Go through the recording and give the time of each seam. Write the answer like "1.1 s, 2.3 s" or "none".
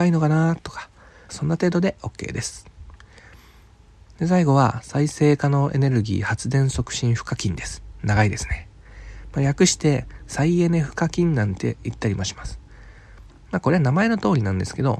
1.3 s